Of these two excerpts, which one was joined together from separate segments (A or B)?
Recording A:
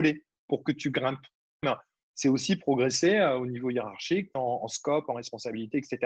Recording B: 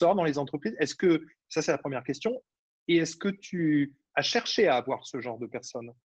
A